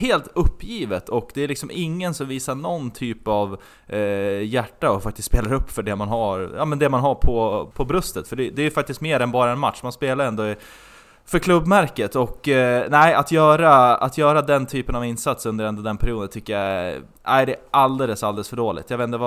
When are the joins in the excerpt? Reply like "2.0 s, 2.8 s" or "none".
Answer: 7.7 s